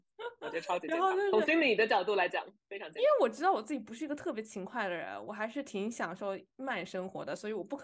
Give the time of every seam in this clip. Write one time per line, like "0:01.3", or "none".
none